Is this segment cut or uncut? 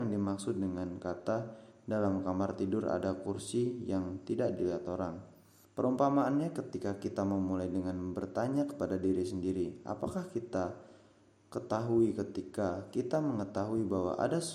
cut